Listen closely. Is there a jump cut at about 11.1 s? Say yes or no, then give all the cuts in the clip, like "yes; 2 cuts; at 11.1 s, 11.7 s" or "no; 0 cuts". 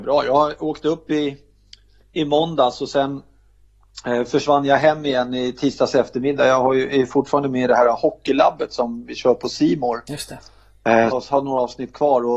yes; 1 cut; at 11.1 s